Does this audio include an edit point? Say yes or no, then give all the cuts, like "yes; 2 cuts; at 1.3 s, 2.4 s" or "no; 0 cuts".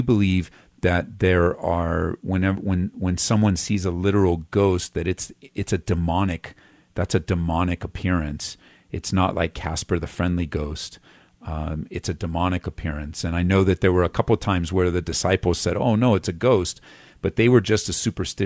no; 0 cuts